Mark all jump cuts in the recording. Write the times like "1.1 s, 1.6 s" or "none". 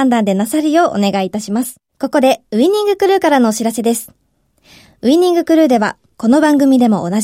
1.9 s